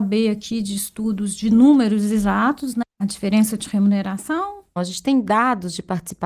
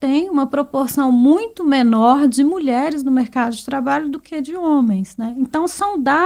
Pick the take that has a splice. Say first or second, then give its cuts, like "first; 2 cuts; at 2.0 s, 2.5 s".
first; 2 cuts; at 2.8 s, 4.8 s